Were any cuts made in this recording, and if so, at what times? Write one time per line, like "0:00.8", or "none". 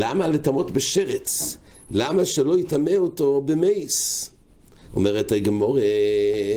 0:04.9